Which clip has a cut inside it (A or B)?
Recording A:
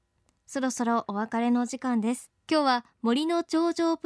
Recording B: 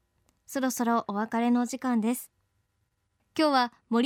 A